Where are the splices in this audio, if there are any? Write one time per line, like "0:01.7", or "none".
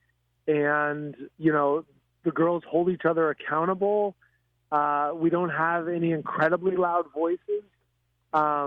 0:01.3